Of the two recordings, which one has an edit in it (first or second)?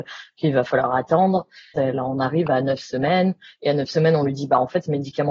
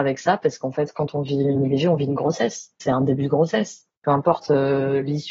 first